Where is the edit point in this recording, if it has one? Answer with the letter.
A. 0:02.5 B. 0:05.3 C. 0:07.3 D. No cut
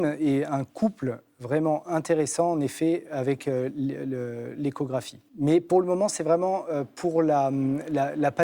B